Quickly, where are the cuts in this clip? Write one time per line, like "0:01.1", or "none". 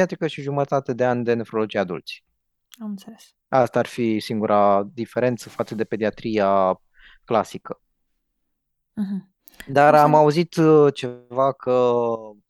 none